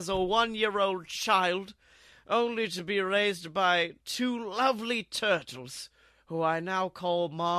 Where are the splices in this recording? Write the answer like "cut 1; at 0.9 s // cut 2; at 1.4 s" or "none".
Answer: none